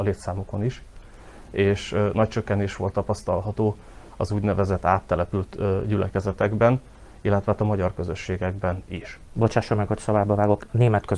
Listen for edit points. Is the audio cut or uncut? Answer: uncut